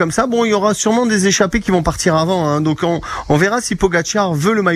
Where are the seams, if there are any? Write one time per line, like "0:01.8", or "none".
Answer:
none